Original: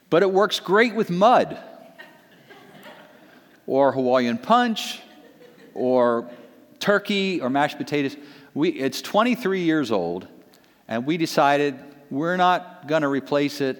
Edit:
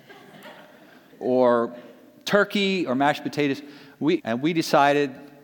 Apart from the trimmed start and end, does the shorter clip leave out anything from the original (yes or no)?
yes